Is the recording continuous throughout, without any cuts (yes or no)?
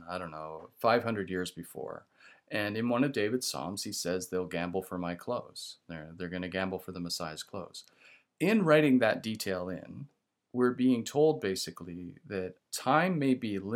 yes